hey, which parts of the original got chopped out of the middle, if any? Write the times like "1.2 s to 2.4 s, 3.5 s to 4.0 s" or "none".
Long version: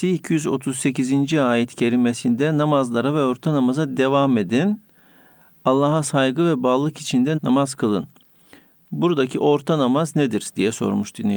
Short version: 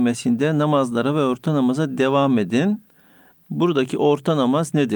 5.3 s to 8.7 s

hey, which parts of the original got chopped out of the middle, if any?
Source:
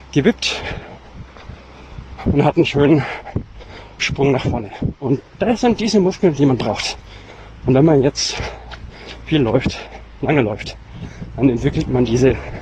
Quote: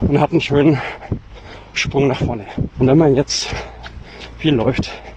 5.0 s to 7.6 s

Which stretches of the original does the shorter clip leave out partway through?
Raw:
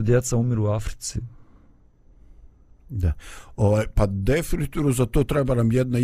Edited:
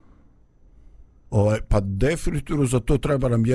2.7 s to 3.6 s

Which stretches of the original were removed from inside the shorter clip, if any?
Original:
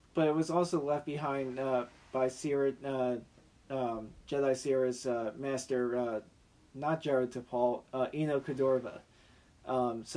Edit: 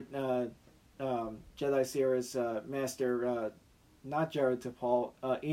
none

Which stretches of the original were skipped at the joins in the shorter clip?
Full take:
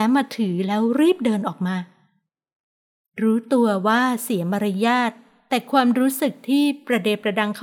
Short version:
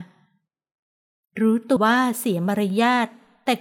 3.6 s to 3.8 s

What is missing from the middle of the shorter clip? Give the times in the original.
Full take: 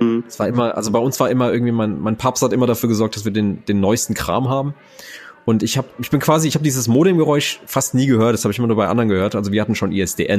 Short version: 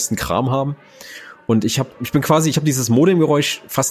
none

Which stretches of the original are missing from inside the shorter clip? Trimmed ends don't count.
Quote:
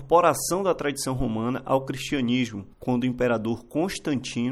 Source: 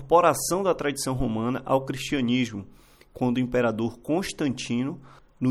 2.7 s to 3.1 s

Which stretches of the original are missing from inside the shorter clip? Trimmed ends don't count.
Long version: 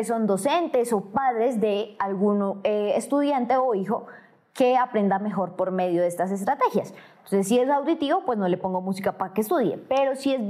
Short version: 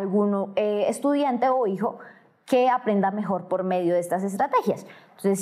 none

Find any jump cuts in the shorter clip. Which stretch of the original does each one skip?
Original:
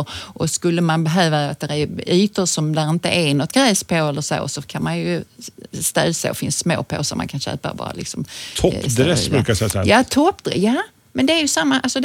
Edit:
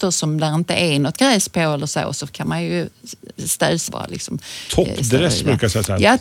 6.2 s to 7.7 s

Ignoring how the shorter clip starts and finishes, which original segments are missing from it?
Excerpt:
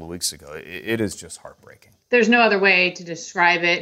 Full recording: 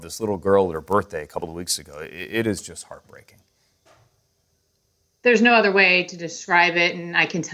3.5 s to 5.1 s

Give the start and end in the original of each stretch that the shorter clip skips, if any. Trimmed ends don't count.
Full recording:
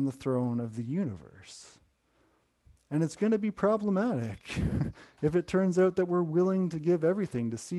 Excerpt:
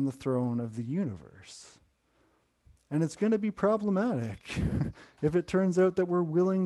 none

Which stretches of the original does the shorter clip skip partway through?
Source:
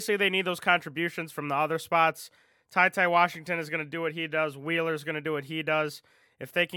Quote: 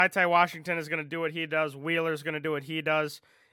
none

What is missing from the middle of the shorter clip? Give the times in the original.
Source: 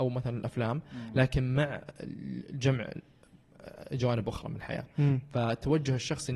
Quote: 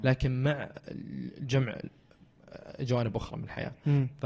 none

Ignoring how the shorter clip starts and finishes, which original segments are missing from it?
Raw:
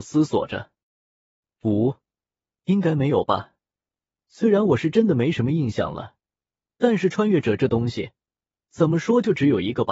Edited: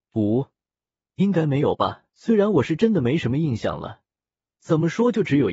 3.6 s to 4.2 s, 6.6 s to 8.6 s

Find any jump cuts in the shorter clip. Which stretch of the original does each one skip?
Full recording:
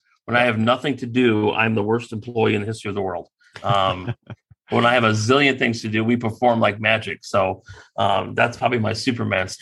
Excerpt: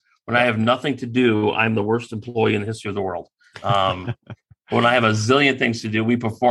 none

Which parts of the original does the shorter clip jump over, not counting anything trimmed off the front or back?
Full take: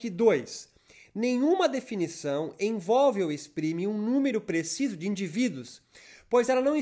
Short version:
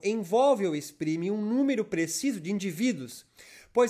none

